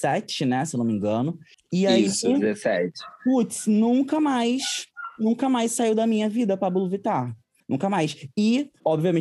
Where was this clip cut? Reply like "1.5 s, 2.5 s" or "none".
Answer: none

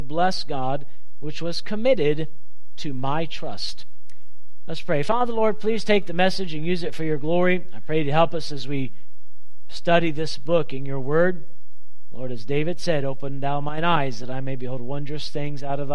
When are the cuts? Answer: none

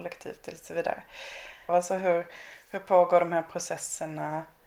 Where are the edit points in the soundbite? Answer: 1.7 s

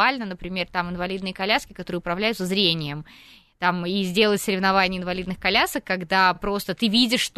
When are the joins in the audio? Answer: none

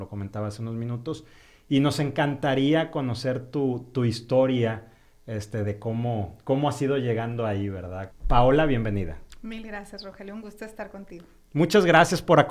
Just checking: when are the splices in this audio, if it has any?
8.1 s

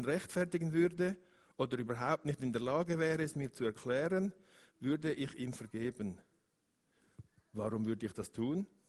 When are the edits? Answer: none

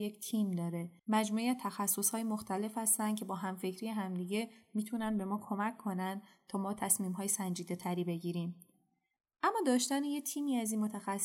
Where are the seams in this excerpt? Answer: 1.0 s

